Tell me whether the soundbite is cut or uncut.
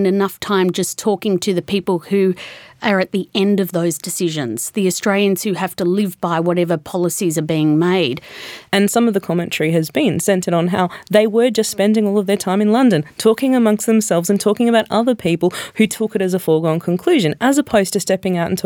cut